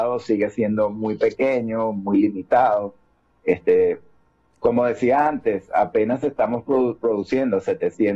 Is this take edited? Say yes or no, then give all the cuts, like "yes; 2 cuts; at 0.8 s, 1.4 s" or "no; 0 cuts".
no; 0 cuts